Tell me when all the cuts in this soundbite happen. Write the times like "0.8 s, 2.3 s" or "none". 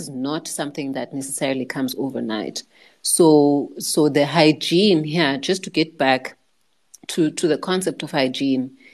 none